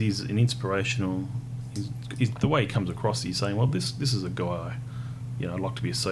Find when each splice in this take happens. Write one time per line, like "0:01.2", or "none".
none